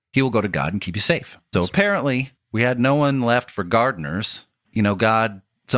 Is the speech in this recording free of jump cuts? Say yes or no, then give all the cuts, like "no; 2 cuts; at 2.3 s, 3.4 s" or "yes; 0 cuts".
no; 1 cut; at 1.5 s